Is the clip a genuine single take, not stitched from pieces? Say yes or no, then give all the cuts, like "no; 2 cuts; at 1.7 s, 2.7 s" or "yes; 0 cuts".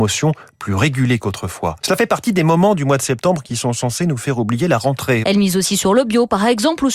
no; 2 cuts; at 1.8 s, 5.2 s